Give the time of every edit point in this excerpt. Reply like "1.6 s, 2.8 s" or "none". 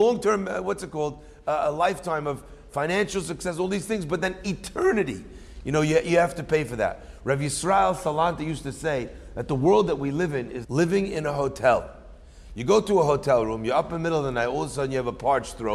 10.6 s